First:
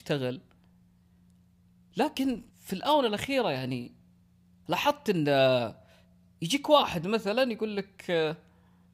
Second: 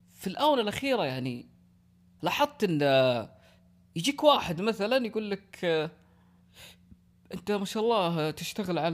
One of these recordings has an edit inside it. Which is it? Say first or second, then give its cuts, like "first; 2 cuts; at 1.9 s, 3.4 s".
first; 1 cut; at 2.5 s